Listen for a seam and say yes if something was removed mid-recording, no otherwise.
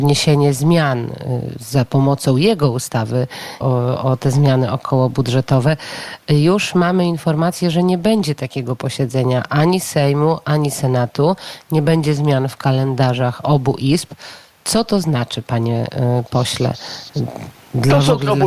yes